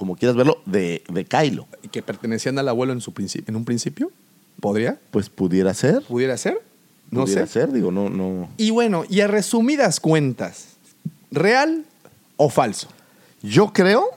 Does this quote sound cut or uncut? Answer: uncut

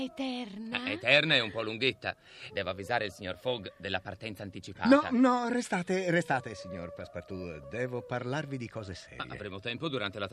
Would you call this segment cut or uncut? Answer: cut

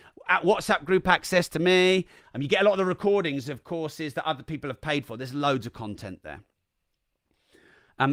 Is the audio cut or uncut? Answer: cut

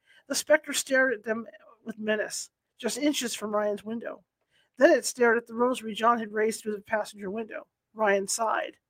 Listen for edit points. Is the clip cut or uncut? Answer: uncut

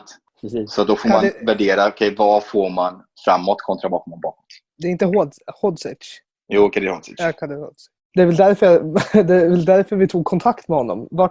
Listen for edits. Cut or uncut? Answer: uncut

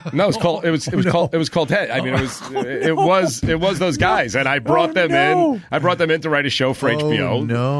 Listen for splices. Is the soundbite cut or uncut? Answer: uncut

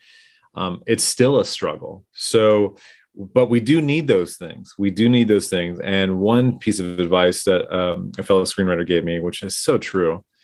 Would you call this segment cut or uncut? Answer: uncut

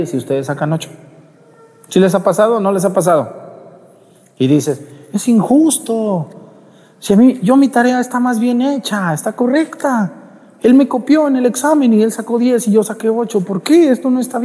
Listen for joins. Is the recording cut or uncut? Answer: uncut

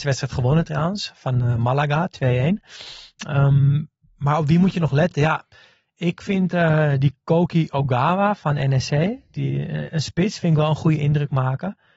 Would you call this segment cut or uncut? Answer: uncut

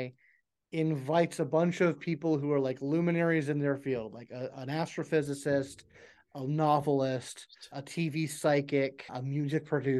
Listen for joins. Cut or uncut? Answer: uncut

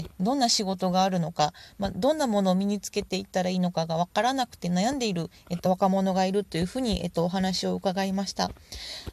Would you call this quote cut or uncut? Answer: uncut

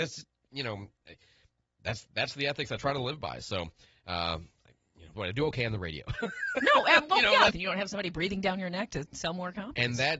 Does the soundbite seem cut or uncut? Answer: cut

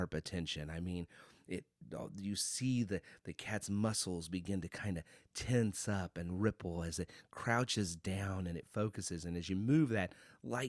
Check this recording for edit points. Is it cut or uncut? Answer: uncut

